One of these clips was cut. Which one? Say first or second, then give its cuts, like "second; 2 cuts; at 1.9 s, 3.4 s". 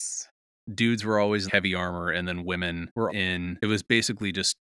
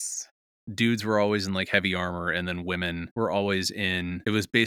first; 2 cuts; at 1.5 s, 3.1 s